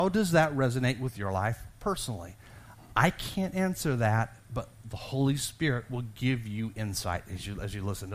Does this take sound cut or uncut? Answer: uncut